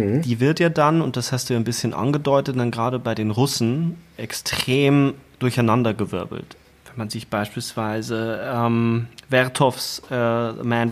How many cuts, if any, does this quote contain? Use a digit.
0